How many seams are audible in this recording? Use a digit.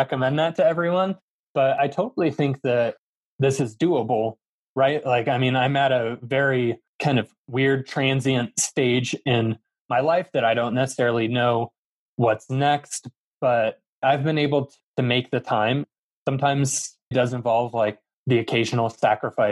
1